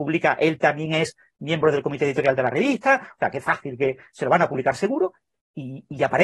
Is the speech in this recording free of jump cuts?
yes; 0 cuts

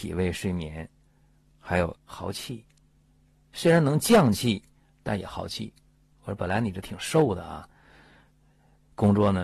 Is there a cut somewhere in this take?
yes; 1 cut; at 2.0 s

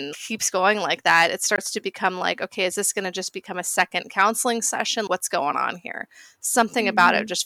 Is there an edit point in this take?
no; 0 cuts

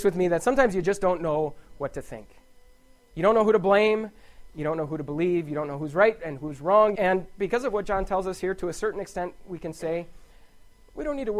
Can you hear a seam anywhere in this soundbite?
yes; 1 cut; at 6.9 s

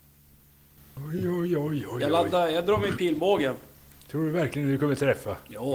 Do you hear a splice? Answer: no; 0 cuts

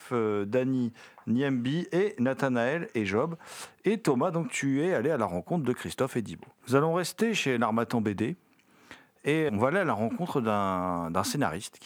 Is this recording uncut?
no; 2 cuts; at 6.5 s, 9.5 s

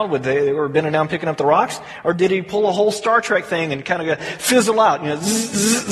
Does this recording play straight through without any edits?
yes; 0 cuts

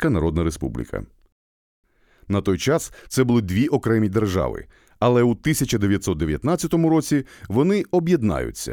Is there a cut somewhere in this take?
no; 0 cuts

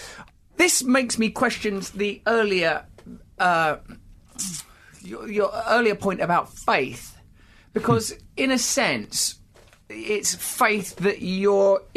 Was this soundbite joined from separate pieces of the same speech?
no; 0 cuts

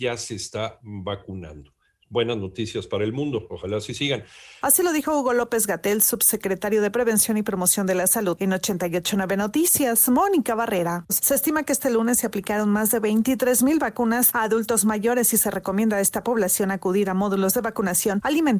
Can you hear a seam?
yes; 2 cuts; at 4.6 s, 11.1 s

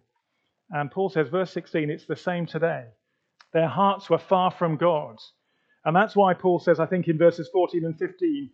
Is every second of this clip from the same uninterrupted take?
no; 1 cut; at 3.3 s

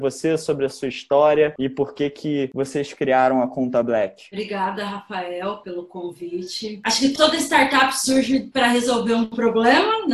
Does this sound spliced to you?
no; 0 cuts

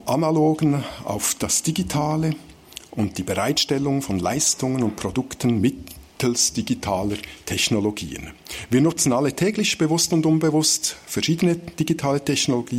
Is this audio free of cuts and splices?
yes; 0 cuts

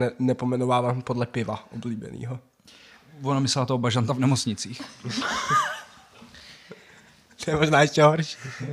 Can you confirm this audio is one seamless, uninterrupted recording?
yes; 0 cuts

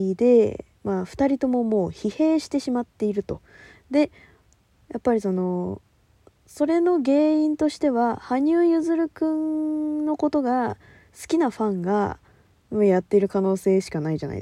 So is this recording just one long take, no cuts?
yes; 0 cuts

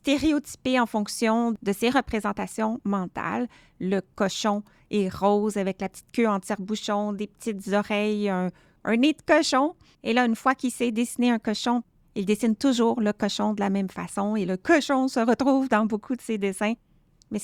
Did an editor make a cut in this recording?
no; 0 cuts

